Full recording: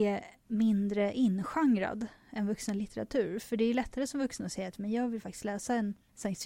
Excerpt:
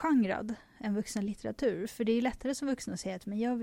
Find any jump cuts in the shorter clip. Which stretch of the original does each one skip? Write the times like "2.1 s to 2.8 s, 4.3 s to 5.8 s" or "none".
none

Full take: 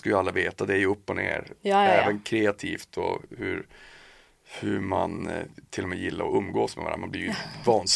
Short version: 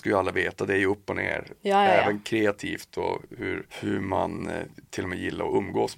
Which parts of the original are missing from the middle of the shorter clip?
3.7 s to 4.5 s

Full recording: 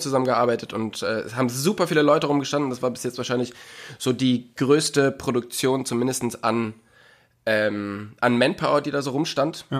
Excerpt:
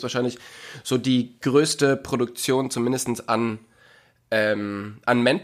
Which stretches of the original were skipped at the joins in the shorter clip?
none

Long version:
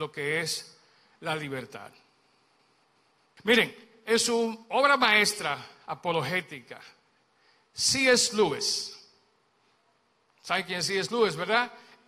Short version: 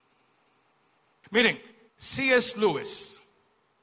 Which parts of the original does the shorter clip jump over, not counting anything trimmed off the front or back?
4.0 s to 7.6 s

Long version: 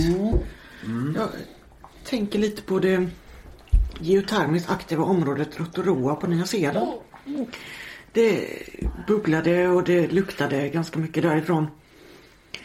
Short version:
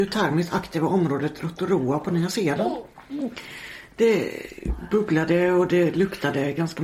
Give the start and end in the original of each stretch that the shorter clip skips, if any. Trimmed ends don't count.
none

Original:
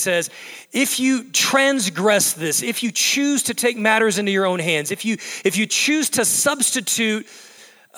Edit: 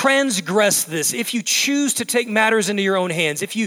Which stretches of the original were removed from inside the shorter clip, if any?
none

